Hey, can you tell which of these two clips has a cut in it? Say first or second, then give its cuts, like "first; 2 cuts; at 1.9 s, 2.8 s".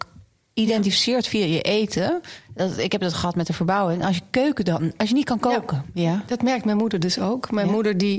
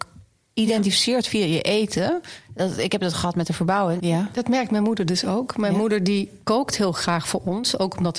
second; 1 cut; at 4.0 s